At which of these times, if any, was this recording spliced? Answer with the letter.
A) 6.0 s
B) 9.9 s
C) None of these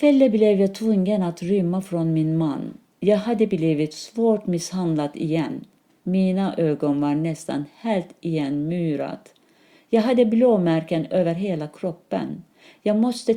A